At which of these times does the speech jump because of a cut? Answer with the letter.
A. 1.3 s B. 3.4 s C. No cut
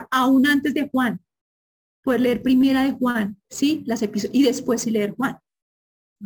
B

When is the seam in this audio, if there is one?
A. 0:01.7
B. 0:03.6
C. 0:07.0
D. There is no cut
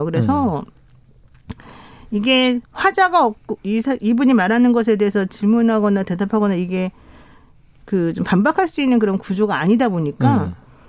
B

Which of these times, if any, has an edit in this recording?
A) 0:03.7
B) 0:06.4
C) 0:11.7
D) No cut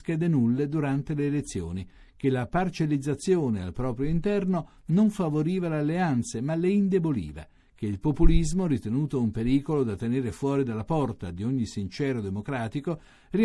D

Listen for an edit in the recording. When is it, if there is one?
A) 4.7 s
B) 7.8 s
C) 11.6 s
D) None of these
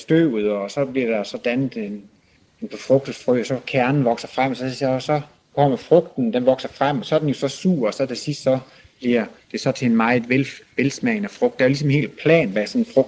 D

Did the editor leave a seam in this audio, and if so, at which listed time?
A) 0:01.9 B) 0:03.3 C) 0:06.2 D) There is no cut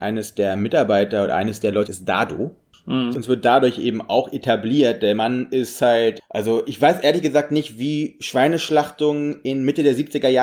A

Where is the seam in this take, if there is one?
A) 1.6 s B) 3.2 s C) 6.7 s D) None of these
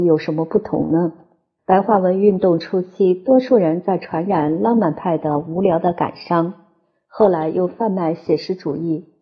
A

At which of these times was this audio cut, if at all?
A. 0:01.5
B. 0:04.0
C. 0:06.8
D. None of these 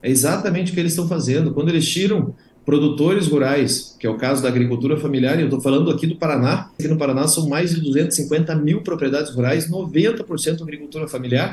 C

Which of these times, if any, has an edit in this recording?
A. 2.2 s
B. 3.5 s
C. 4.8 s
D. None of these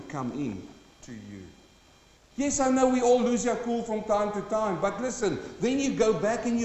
A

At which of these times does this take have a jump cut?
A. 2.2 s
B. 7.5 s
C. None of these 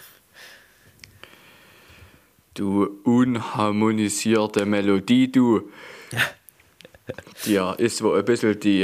C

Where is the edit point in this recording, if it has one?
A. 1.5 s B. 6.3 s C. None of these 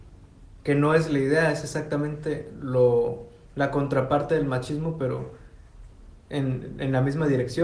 C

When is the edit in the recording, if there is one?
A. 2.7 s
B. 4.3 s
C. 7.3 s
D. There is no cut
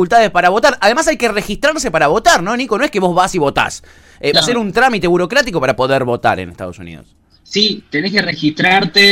B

